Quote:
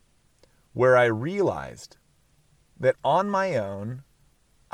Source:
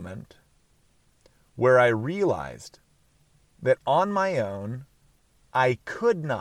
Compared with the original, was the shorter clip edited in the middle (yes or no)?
no